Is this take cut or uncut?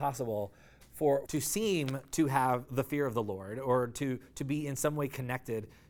cut